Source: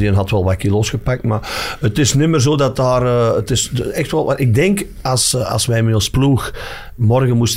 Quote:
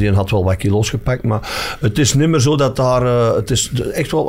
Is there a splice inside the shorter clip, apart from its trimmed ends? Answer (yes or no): no